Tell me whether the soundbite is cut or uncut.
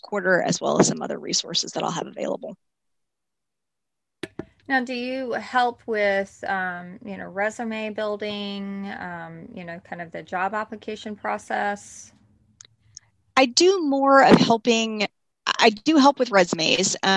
uncut